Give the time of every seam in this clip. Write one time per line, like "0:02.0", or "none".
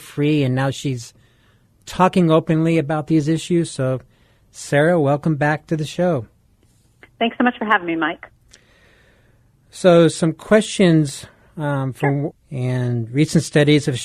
0:12.3